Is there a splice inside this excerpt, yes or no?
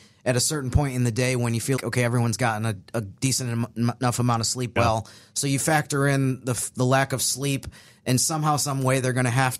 yes